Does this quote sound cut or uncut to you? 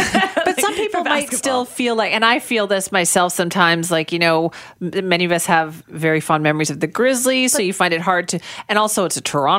uncut